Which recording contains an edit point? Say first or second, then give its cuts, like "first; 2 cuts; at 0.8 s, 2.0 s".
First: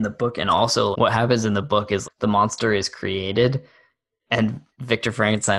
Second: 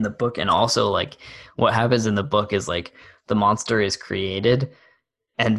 first; 2 cuts; at 0.9 s, 2.0 s